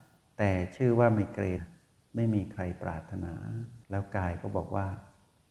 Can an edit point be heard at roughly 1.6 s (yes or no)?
yes